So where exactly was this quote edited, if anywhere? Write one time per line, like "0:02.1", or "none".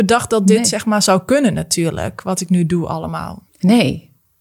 0:03.5